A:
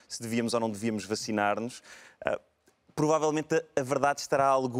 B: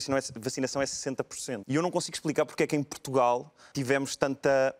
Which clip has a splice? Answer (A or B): B